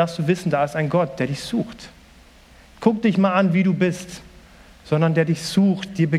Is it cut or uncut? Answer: cut